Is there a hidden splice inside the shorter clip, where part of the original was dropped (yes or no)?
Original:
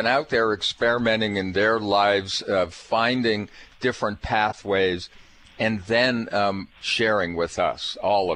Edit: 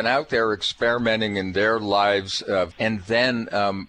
yes